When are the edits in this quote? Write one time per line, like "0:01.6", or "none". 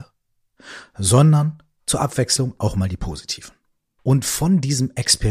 0:04.0